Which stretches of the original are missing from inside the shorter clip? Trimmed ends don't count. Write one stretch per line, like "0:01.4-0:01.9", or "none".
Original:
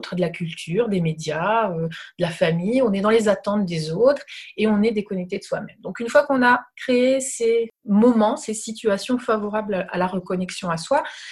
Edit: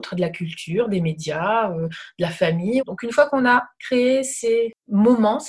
0:02.8-0:05.8